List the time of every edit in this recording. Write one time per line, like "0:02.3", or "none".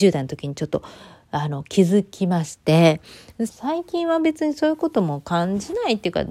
0:03.5